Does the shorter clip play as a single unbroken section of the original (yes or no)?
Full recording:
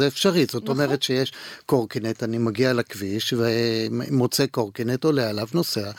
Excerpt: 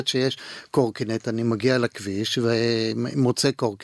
yes